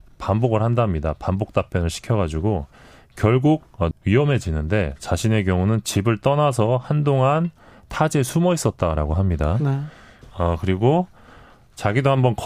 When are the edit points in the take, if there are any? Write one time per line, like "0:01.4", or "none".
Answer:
0:03.9
0:10.2